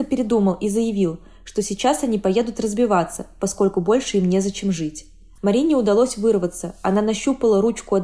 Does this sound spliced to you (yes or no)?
no